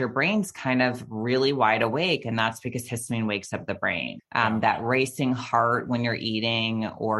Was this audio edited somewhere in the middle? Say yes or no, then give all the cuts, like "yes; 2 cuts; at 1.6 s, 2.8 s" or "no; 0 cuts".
yes; 1 cut; at 4.2 s